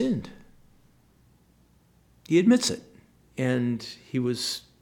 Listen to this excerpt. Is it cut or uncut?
cut